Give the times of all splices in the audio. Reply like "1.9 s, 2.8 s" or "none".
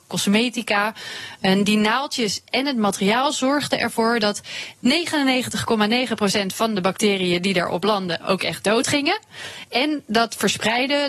none